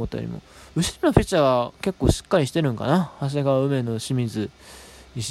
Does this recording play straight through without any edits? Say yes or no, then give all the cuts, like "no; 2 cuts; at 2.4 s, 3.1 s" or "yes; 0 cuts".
yes; 0 cuts